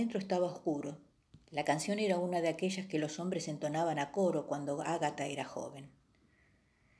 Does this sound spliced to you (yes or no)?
yes